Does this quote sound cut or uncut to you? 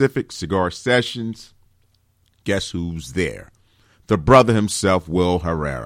uncut